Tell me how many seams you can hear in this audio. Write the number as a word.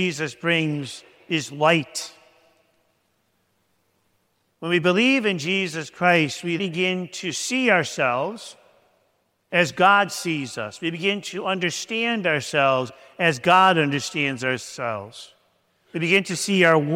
one